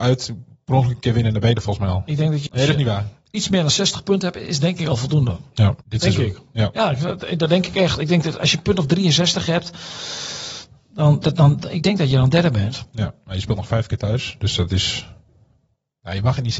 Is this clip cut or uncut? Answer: cut